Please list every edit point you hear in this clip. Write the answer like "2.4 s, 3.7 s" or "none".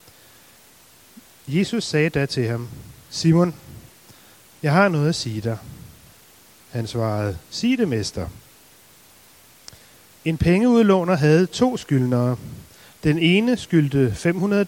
none